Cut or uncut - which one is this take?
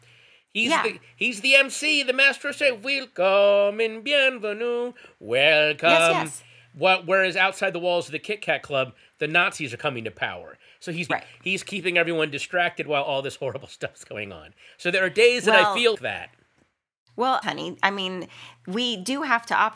cut